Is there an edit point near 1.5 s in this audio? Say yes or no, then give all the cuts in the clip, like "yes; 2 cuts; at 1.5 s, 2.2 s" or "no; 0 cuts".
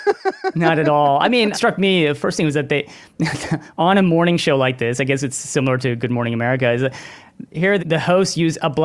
yes; 2 cuts; at 1.5 s, 7.8 s